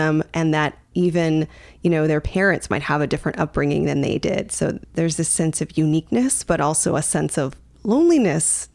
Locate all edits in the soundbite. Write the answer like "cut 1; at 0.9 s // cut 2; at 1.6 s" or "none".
none